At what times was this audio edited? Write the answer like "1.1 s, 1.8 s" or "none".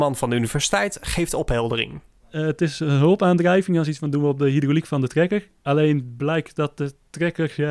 none